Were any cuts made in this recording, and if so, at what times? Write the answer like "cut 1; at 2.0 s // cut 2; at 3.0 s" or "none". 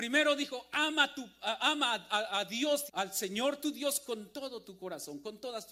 cut 1; at 2.9 s